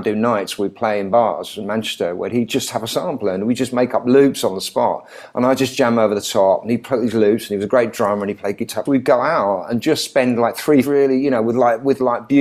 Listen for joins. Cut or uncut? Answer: cut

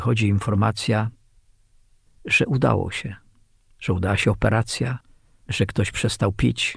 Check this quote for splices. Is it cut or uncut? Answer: uncut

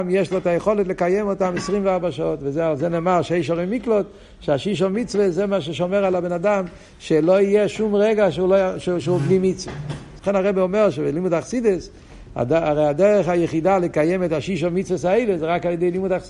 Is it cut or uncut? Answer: cut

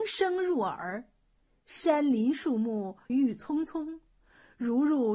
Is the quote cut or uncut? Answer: cut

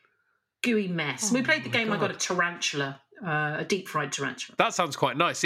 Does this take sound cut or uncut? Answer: uncut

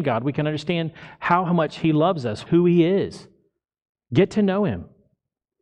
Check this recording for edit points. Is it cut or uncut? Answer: cut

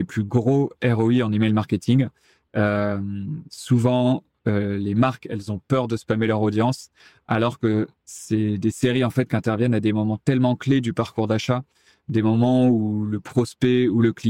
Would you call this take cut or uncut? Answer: uncut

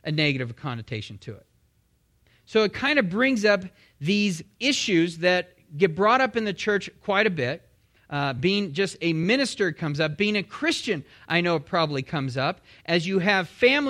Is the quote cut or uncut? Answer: cut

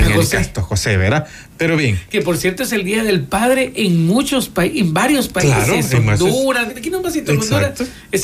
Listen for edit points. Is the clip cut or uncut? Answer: cut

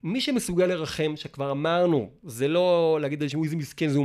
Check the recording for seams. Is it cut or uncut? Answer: uncut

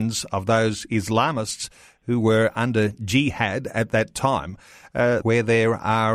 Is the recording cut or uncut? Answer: cut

